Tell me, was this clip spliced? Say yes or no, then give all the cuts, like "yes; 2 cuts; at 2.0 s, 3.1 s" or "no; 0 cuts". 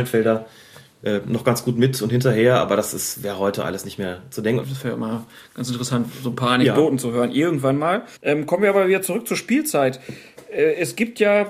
yes; 2 cuts; at 4.6 s, 8.2 s